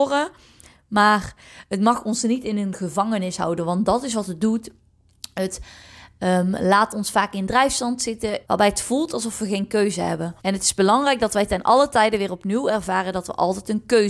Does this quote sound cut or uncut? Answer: cut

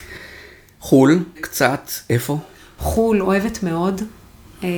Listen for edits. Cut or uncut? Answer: cut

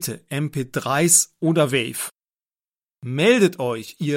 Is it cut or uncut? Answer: uncut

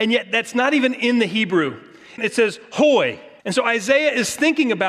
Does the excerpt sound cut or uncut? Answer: cut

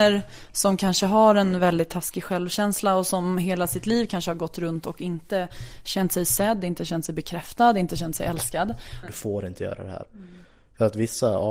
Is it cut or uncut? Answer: cut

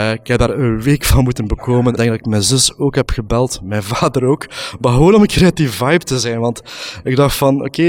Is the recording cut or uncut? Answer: cut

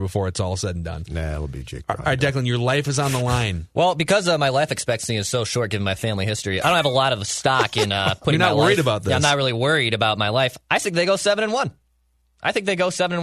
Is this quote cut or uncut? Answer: cut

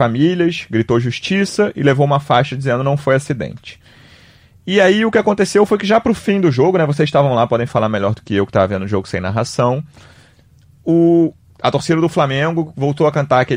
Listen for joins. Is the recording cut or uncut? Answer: uncut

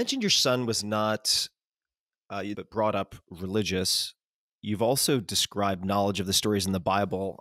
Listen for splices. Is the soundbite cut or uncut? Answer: cut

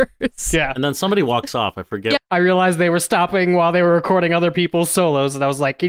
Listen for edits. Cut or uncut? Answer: cut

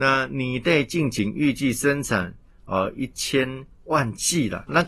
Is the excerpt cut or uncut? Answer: uncut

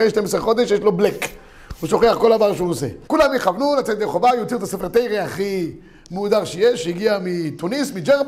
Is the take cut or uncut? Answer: cut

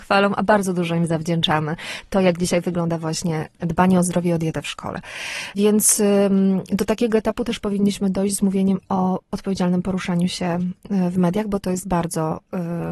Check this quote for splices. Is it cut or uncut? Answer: uncut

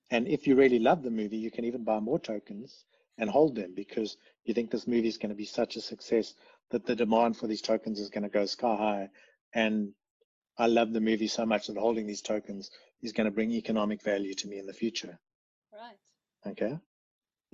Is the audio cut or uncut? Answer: uncut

